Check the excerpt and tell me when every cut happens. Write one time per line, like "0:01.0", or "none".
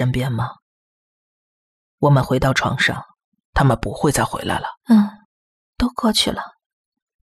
0:03.4
0:04.8